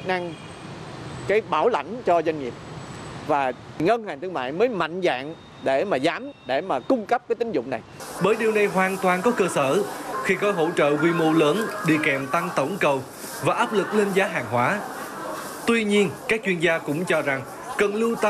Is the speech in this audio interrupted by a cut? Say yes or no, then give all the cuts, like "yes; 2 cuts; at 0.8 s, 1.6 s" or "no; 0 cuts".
yes; 2 cuts; at 8.2 s, 15.6 s